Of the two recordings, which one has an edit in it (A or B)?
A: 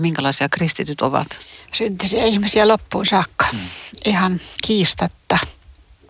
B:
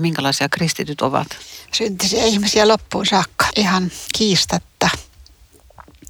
B